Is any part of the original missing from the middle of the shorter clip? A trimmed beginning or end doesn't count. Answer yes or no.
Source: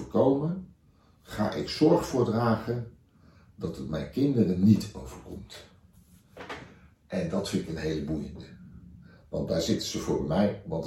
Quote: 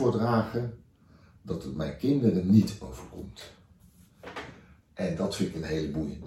no